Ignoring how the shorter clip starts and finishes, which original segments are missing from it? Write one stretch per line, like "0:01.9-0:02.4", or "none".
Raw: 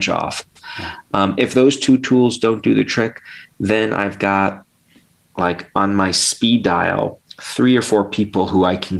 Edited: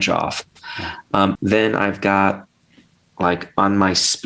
0:01.4-0:03.5